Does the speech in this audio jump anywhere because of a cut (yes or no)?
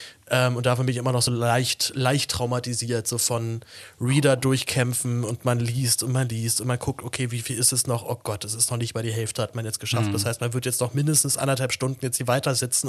no